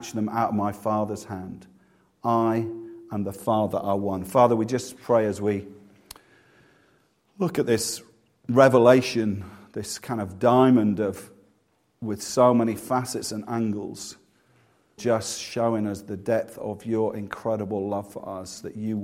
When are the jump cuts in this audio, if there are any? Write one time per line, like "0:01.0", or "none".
0:15.0